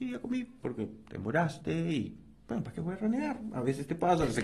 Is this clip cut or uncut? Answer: uncut